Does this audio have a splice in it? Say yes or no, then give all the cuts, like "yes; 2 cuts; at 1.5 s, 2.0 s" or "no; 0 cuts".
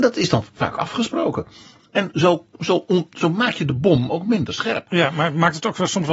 no; 0 cuts